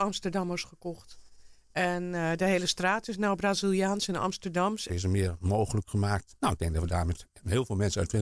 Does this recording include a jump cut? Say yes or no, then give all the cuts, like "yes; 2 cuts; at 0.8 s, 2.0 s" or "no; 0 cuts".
yes; 2 cuts; at 4.9 s, 6.3 s